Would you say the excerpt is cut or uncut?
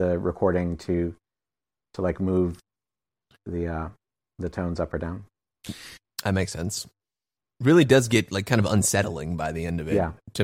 uncut